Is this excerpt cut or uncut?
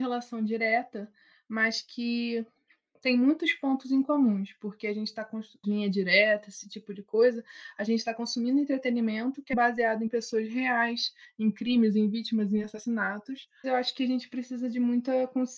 cut